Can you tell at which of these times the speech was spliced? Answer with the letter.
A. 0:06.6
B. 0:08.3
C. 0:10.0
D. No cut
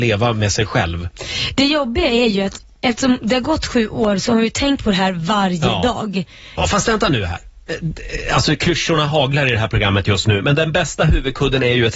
A